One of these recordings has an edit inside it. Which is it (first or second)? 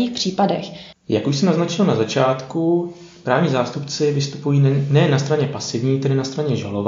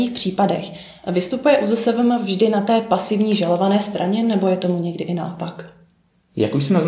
first